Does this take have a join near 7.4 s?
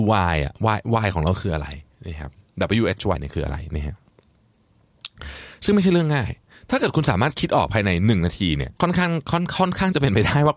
no; 2 cuts; at 3.1 s, 8.8 s

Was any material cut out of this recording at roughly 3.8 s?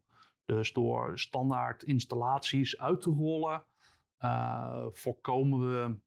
no; 0 cuts

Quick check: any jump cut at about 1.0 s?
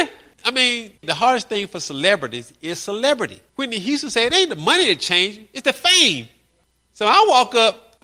yes; 1 cut; at 1.0 s

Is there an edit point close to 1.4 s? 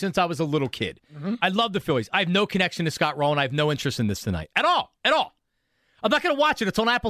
no; 0 cuts

